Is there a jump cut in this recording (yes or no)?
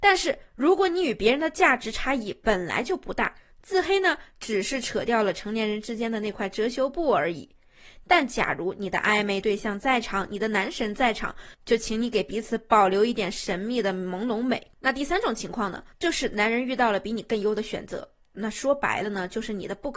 yes